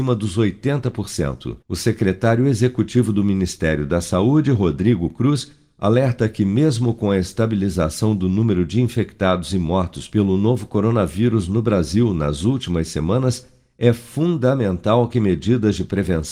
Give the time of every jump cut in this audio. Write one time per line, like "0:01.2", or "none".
0:01.6